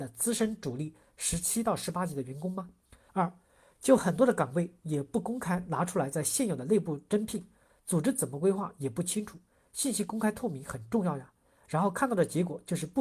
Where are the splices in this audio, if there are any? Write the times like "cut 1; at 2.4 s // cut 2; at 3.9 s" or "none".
cut 1; at 3.1 s

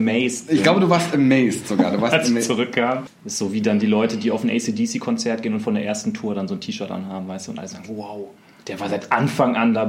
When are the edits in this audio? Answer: cut 1; at 3.1 s

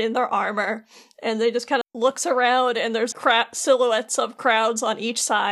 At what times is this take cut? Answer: cut 1; at 1.8 s // cut 2; at 3.1 s

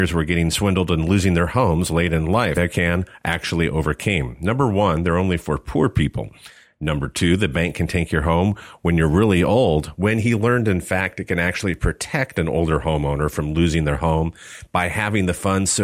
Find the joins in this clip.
cut 1; at 2.5 s

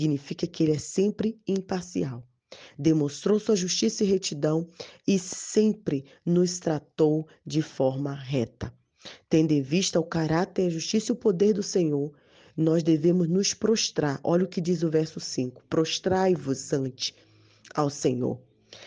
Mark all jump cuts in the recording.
none

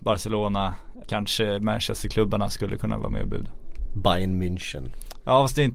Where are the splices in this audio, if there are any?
cut 1; at 1.0 s // cut 2; at 3.9 s

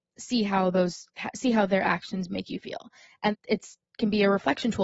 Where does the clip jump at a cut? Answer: cut 1; at 3.3 s

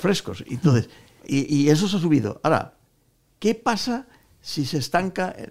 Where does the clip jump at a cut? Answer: cut 1; at 1.2 s

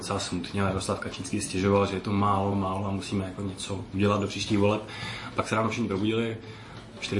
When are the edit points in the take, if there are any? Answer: cut 1; at 2.5 s

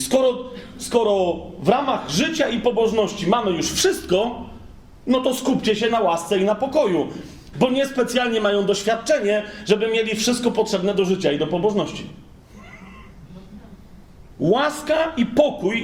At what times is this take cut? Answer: cut 1; at 7.5 s // cut 2; at 14.3 s

